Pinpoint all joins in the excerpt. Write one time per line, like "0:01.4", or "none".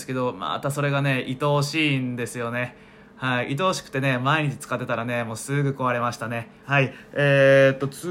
0:06.6